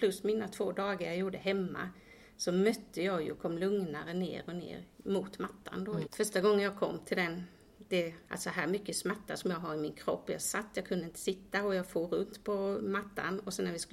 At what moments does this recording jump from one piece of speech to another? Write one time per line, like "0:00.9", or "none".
0:06.0
0:08.2